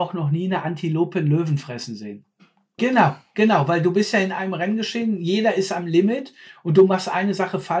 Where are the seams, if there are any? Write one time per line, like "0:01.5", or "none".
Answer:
0:02.8